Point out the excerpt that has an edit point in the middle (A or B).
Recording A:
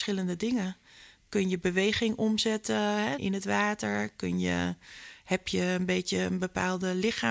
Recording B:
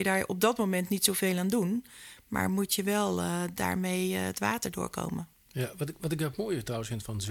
A